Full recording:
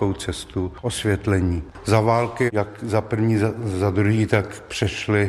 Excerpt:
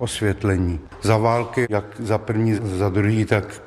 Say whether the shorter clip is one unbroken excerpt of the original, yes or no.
no